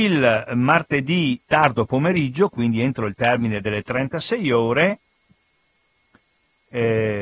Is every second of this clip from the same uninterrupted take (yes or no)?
no